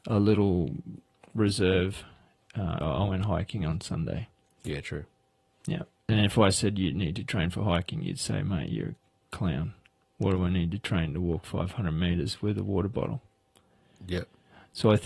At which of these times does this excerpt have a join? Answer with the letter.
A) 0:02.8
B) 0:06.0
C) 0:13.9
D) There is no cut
A